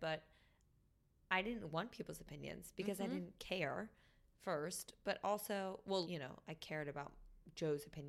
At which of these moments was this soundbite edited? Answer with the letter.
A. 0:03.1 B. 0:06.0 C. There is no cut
B